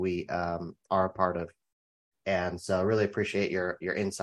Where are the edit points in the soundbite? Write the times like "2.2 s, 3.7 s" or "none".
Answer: 2.1 s